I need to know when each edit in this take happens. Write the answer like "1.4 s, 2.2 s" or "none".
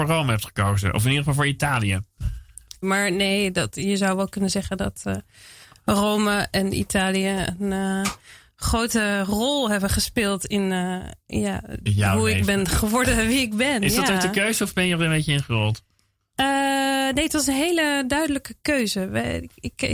2.8 s